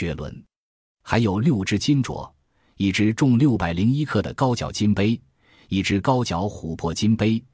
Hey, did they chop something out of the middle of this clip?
no; 0 cuts

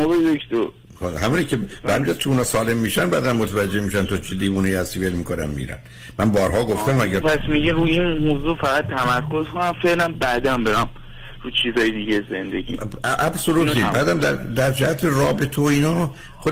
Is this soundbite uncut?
no; 1 cut; at 7.2 s

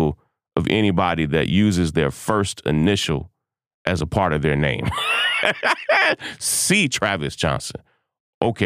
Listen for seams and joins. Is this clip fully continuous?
yes; 0 cuts

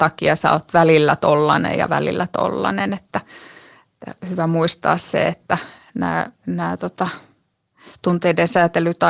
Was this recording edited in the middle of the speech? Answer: no; 0 cuts

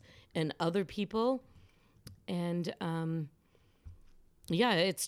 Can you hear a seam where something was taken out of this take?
no; 0 cuts

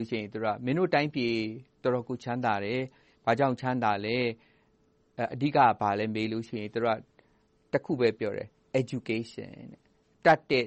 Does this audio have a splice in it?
no; 0 cuts

